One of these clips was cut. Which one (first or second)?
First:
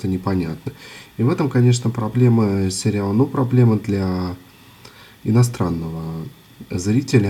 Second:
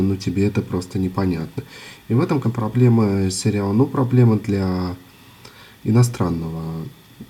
second